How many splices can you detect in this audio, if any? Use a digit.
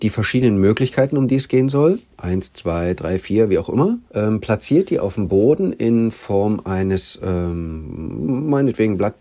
1